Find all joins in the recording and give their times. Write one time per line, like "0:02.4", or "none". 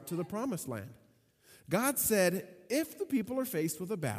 none

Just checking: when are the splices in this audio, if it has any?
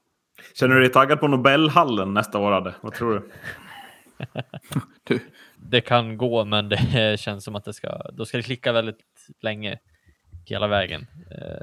0:02.8
0:05.6

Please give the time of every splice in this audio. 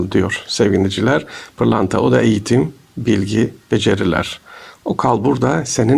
none

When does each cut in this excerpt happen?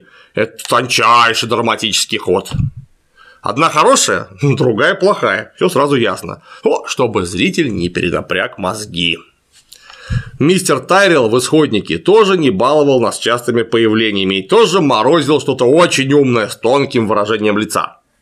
none

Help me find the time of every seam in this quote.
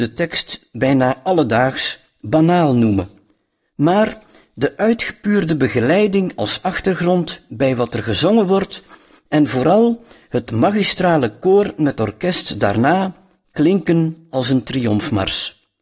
none

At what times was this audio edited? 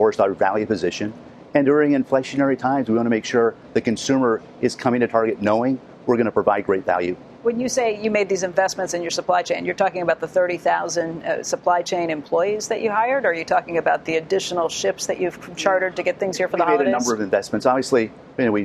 none

